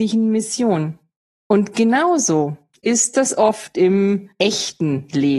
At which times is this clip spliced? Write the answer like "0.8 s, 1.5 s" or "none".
none